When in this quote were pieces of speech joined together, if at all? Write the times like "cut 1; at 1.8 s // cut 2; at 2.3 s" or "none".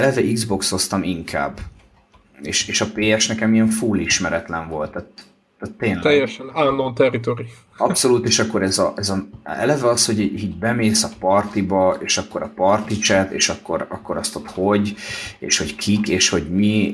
none